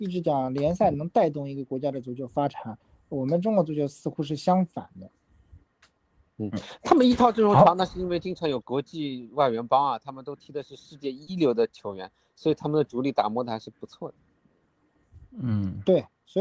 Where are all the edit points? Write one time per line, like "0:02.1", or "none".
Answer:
0:06.4
0:08.6